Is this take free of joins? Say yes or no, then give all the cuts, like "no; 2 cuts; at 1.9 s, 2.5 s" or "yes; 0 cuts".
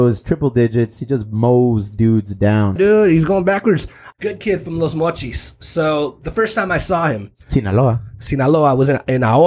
no; 2 cuts; at 2.8 s, 4.1 s